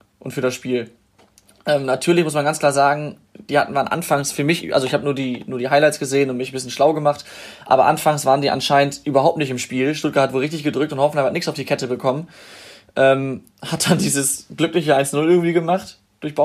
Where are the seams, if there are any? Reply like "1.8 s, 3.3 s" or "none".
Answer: none